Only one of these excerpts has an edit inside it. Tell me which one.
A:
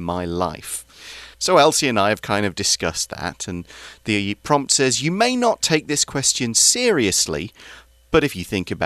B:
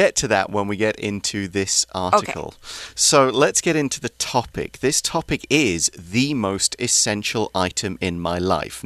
A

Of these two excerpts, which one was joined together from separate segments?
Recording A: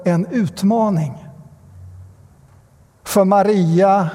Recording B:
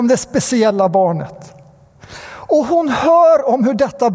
A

